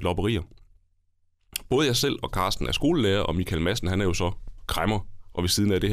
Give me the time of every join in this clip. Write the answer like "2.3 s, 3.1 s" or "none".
none